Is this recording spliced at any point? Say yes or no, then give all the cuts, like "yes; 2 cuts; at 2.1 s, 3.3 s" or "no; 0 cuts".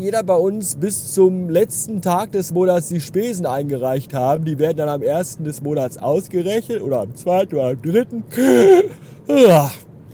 no; 0 cuts